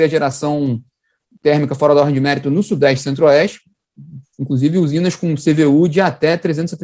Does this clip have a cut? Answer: yes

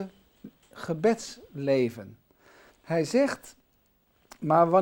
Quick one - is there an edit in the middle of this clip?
yes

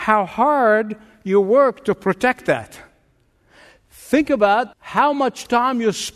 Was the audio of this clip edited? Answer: yes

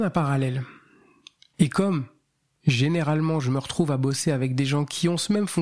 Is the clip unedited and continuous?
no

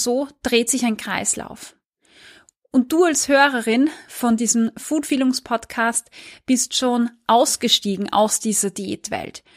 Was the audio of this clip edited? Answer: no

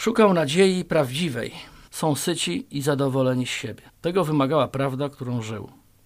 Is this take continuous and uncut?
no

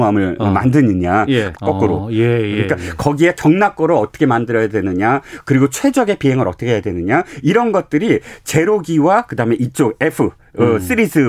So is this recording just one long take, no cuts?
no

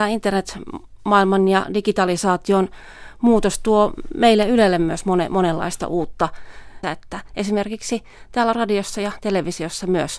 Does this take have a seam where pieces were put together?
yes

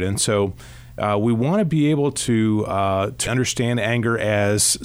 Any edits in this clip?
yes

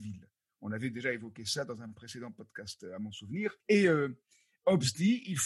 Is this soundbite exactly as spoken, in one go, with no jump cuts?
no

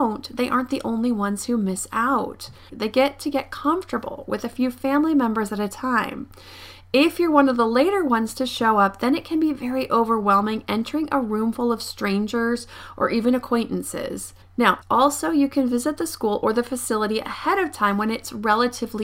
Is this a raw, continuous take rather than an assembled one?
no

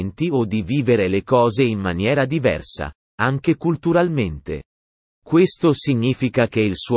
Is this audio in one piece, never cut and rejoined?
no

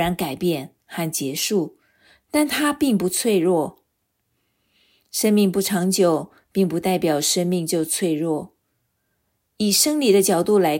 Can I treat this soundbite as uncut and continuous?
yes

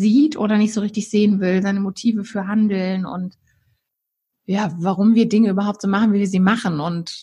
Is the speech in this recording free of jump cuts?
yes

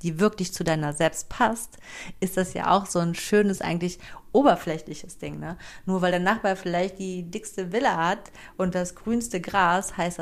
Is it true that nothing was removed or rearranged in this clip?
yes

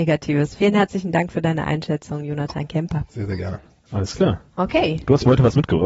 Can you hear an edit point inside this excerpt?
yes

